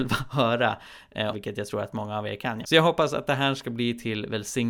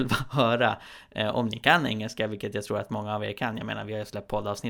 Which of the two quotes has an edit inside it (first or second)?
first